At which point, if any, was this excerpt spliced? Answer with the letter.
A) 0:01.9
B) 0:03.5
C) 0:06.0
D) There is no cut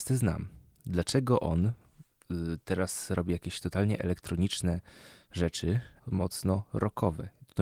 C